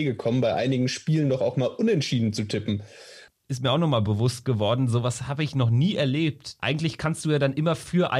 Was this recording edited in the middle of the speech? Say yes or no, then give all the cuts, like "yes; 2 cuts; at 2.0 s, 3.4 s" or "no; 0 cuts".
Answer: yes; 2 cuts; at 3.3 s, 6.6 s